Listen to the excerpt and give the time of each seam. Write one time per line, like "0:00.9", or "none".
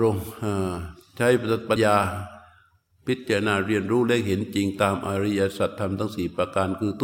0:01.8